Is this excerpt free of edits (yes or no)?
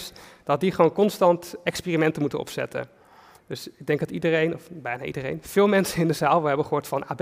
yes